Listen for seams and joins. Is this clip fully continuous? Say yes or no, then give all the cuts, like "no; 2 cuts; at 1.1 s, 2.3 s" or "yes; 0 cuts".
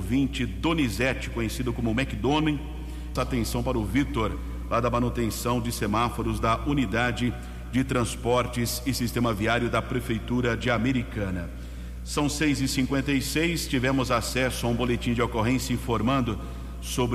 no; 1 cut; at 3.2 s